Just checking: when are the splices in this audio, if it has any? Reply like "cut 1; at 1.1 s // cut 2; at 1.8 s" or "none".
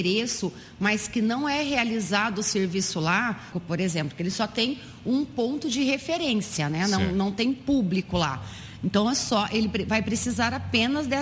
cut 1; at 3.5 s